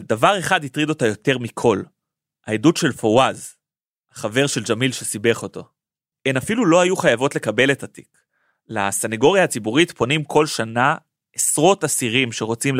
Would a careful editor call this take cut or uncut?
cut